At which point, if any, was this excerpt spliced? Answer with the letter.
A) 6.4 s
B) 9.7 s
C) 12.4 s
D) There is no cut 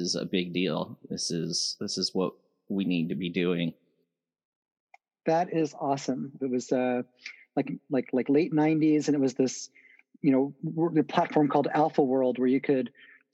A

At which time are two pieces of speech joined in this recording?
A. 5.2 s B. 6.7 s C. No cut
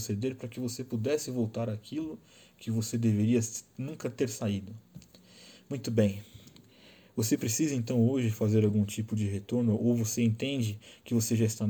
C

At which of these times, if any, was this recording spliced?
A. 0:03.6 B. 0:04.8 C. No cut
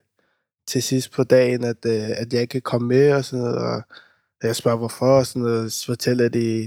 C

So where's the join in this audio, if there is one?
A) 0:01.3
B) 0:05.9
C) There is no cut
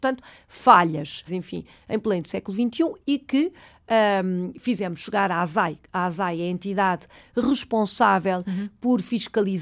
A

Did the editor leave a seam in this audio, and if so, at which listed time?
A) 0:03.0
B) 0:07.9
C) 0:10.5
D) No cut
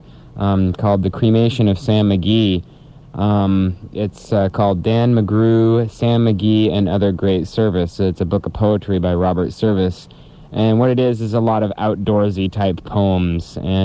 A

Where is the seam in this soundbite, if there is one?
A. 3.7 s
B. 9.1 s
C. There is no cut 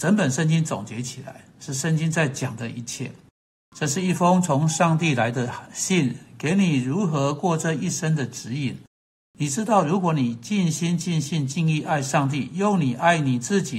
A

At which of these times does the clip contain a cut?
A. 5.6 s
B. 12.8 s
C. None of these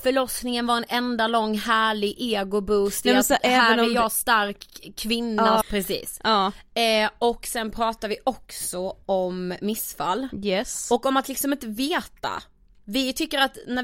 A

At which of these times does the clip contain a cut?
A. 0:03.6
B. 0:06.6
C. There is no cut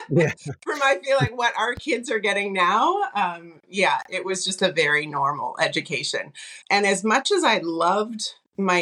B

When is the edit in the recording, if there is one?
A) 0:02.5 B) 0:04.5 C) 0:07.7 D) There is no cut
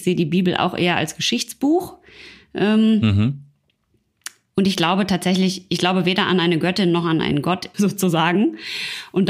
C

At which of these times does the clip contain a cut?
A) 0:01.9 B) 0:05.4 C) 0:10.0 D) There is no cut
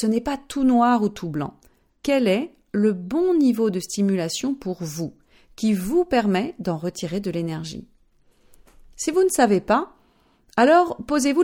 A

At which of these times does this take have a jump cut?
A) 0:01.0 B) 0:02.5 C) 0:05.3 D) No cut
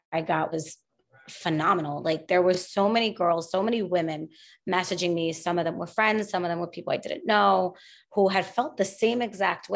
D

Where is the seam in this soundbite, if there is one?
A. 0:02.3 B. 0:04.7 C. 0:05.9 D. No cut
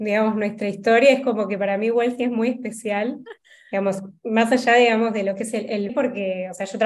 C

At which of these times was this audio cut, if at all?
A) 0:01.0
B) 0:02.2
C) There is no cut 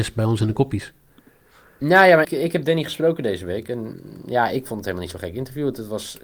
B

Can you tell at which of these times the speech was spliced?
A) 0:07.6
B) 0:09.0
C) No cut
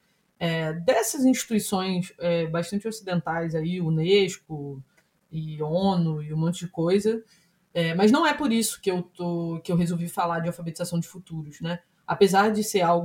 C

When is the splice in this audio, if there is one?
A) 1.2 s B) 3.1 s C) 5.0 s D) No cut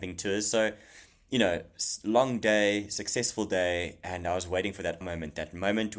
C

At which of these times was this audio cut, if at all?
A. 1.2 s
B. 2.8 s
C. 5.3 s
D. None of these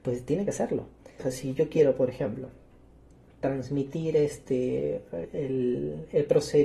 A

